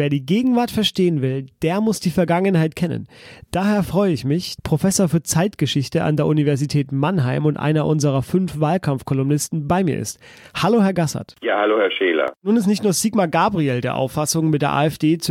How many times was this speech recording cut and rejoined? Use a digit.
1